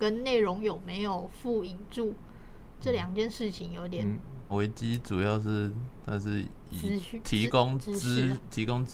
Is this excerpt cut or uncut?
cut